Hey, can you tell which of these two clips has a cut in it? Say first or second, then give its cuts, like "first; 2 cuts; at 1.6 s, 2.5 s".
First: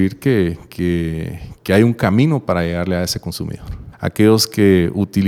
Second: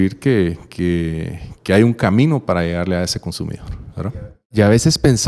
first; 1 cut; at 3.9 s